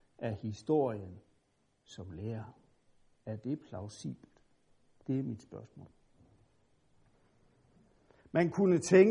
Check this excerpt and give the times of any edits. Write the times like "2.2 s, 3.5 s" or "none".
8.2 s